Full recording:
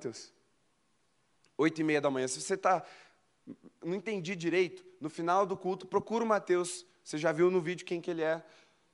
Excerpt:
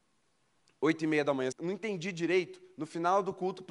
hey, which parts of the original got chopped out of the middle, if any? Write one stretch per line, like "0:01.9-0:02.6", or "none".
0:02.3-0:03.7